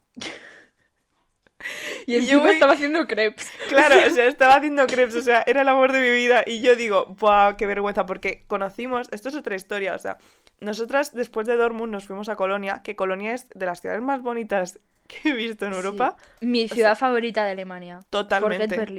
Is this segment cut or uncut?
cut